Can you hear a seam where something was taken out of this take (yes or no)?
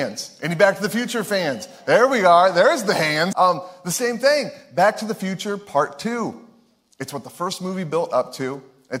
yes